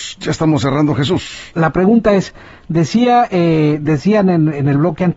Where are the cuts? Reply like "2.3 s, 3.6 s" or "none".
1.5 s